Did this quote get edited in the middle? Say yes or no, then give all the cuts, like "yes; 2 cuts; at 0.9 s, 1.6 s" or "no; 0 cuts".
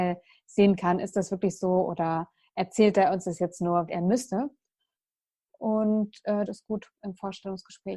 yes; 2 cuts; at 3.9 s, 6.5 s